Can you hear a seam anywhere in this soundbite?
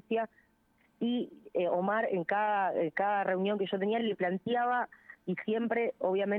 no; 0 cuts

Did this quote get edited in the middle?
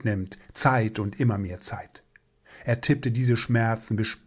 no; 0 cuts

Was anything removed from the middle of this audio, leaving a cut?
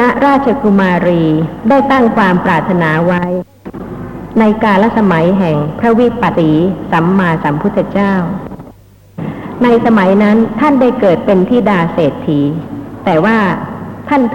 yes; 1 cut; at 6.3 s

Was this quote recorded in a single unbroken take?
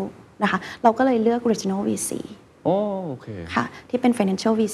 yes; 0 cuts

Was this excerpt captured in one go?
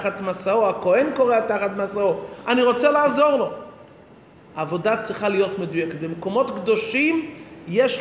yes; 0 cuts

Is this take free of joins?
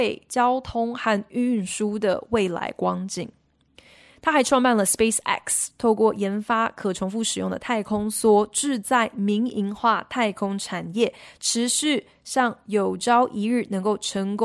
yes; 0 cuts

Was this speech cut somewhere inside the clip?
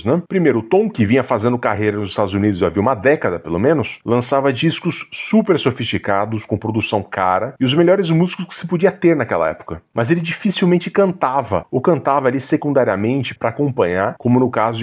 no; 0 cuts

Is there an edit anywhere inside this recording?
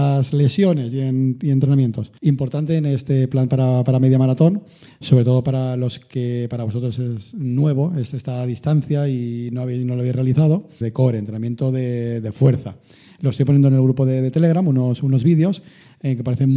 yes; 2 cuts; at 2.2 s, 10.8 s

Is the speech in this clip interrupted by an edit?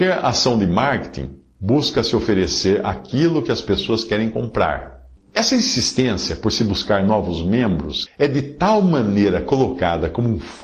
yes; 2 cuts; at 5.2 s, 8.1 s

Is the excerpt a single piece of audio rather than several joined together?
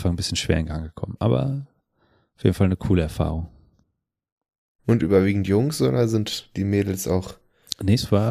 yes; 0 cuts

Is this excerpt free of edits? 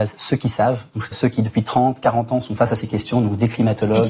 no; 1 cut; at 1.1 s

